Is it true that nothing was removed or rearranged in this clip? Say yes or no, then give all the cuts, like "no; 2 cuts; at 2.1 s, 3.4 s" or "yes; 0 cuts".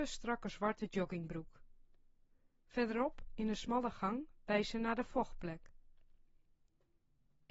yes; 0 cuts